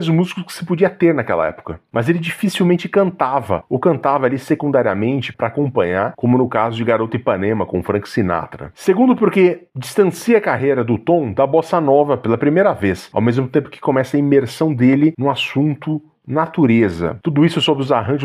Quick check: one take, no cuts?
no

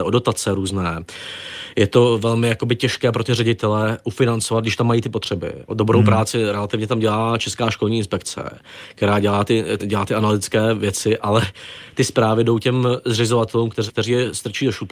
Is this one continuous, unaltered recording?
no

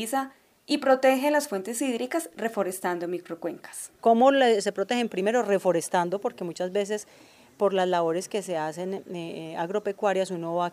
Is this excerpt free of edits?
no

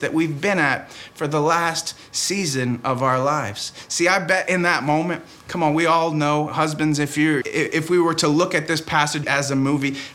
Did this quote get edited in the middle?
yes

